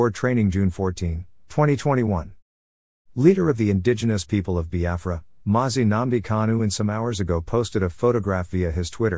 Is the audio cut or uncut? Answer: uncut